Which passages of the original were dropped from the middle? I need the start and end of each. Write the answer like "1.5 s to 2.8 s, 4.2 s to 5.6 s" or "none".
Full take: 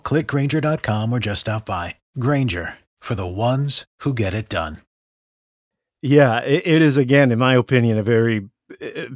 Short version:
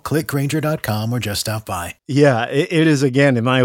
2.0 s to 5.9 s

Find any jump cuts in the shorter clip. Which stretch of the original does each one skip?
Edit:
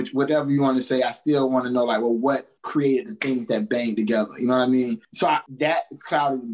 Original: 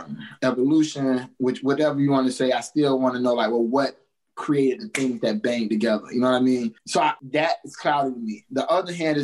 4.1 s to 4.3 s

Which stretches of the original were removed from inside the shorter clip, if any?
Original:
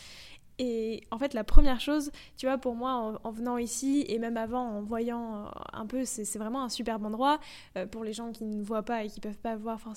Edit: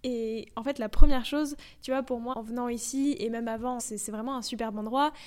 2.9 s to 3.2 s, 4.7 s to 6.1 s

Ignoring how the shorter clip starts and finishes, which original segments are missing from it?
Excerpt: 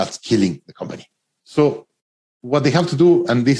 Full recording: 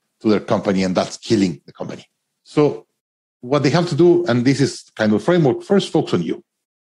none

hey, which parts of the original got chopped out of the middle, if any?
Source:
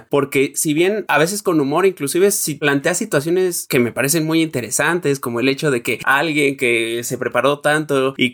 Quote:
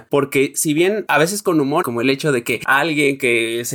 1.8 s to 5.2 s

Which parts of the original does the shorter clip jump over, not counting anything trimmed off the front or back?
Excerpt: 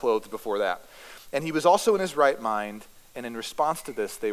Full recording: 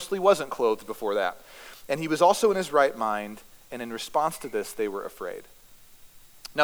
none

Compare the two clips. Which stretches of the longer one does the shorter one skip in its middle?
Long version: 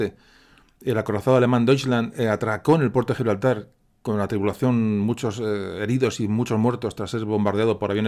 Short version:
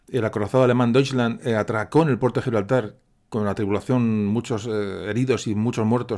none

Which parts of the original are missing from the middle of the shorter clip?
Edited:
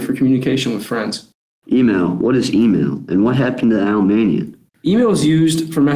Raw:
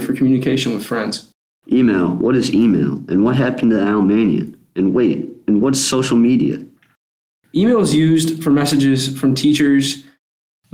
4.7 s to 7.4 s

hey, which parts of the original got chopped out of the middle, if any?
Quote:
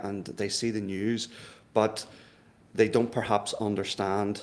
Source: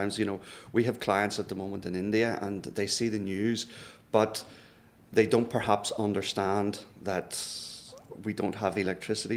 none

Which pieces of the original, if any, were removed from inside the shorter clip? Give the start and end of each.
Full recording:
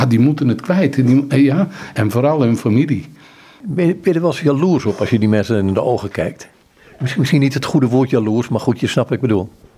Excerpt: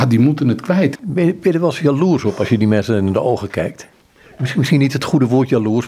1.0 s to 3.6 s

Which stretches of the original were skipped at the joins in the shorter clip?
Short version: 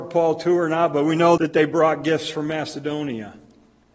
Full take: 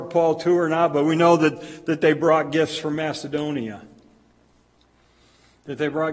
1.4 s to 1.9 s

